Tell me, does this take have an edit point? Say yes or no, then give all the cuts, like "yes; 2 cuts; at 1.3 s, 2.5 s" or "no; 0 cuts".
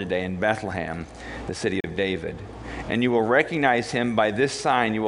no; 0 cuts